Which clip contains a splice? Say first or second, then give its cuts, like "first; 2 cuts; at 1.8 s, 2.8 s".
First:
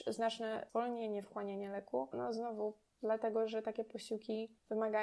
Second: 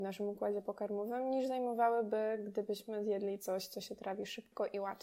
first; 1 cut; at 2.1 s